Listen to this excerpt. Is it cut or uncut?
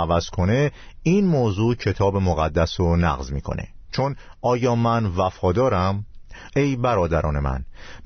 cut